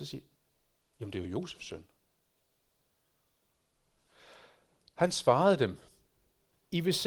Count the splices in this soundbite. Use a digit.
0